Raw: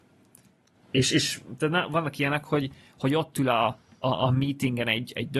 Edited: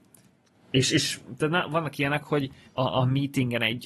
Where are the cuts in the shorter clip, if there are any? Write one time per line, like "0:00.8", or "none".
0:02.6